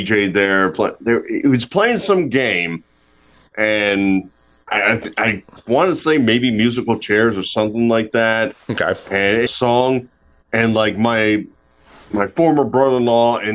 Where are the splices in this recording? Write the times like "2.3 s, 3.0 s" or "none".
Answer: 9.5 s